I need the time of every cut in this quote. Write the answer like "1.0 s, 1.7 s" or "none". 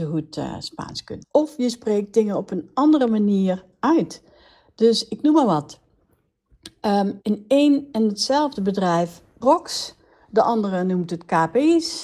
1.2 s, 7.2 s, 9.4 s